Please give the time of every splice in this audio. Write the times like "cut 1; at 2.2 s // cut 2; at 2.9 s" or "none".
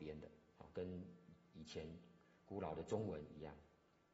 none